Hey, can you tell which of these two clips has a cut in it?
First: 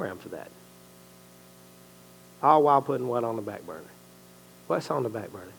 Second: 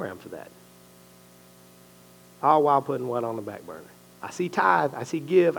second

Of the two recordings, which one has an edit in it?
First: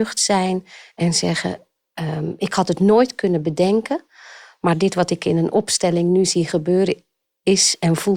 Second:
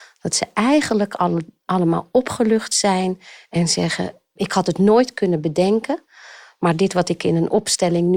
second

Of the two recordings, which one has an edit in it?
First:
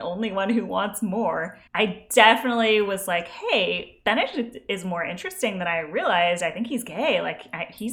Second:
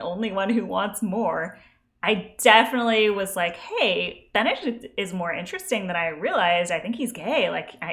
first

